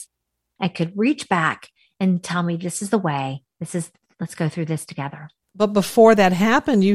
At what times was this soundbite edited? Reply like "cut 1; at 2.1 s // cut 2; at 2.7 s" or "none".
cut 1; at 5.4 s

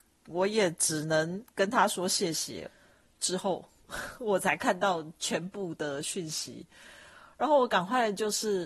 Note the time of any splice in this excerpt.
cut 1; at 2.7 s

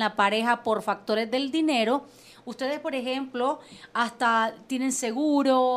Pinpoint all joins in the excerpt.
none

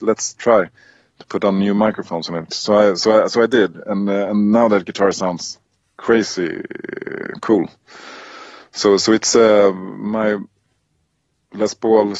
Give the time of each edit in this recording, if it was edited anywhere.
none

